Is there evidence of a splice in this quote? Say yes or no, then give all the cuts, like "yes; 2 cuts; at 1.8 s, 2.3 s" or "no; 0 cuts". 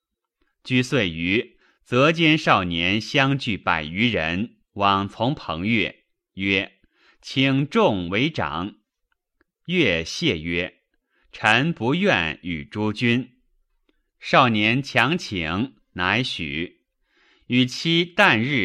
no; 0 cuts